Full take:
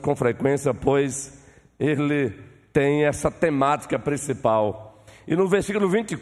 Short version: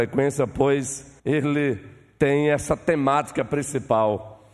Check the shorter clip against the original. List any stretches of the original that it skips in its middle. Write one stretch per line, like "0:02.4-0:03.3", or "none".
0:01.5-0:01.7